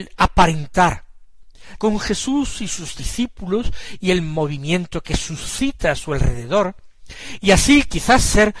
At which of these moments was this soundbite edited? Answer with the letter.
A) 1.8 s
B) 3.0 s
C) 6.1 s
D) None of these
A